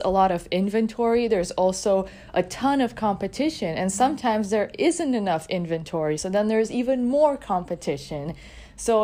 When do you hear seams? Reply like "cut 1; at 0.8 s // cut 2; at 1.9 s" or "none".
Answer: none